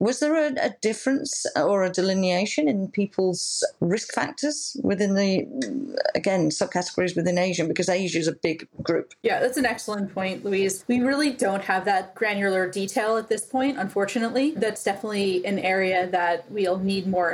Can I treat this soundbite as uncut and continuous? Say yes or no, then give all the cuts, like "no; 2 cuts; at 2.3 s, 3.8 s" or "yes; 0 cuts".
yes; 0 cuts